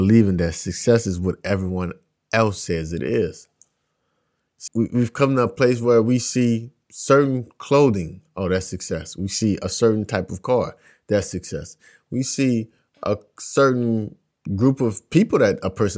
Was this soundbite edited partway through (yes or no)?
yes